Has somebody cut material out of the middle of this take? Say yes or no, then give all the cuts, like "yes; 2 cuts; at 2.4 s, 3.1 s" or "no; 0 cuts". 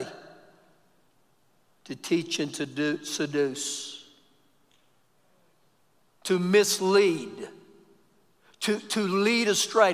no; 0 cuts